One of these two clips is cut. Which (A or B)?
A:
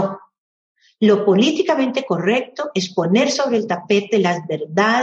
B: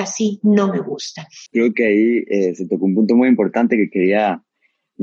B